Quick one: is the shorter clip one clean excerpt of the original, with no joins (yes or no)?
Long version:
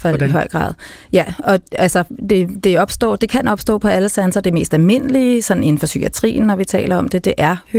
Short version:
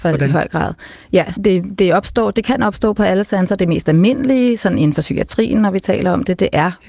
no